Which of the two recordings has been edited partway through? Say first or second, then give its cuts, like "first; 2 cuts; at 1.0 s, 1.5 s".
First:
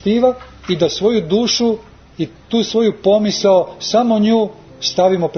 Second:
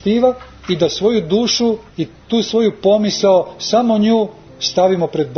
second; 1 cut; at 1.9 s